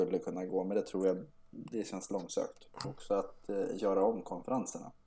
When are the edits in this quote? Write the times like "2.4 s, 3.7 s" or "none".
2.8 s